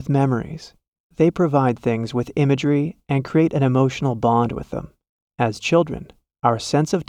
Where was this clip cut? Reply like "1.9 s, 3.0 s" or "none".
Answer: 1.0 s, 5.3 s